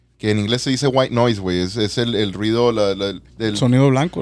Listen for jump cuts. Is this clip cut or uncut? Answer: cut